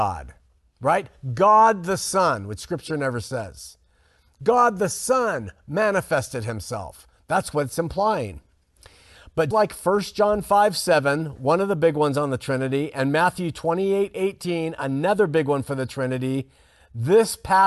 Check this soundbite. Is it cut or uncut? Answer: cut